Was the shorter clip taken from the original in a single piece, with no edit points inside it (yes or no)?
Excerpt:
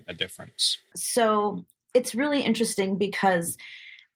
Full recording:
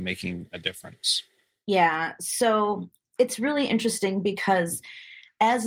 no